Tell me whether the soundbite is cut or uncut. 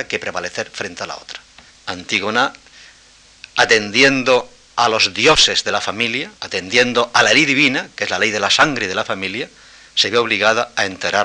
cut